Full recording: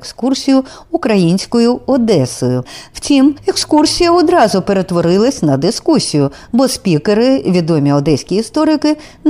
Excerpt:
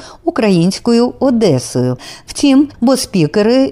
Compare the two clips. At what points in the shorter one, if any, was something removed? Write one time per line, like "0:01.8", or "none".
0:02.7